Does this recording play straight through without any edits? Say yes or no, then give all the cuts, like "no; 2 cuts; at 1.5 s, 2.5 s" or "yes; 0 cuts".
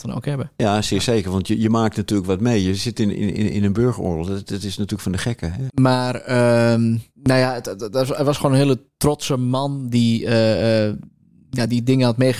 no; 3 cuts; at 5.7 s, 7.1 s, 8.9 s